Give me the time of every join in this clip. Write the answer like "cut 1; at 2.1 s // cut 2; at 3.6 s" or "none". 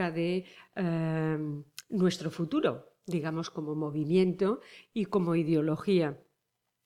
none